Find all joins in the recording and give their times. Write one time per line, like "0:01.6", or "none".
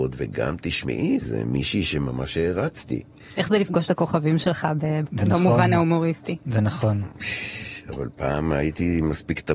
0:05.1